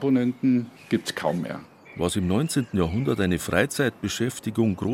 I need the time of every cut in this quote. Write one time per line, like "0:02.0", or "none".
0:01.8